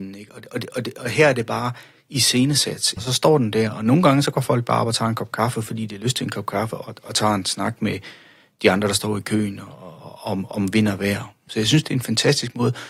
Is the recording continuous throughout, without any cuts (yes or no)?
no